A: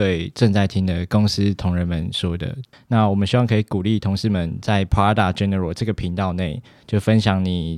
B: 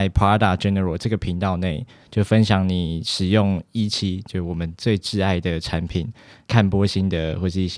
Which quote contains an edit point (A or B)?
A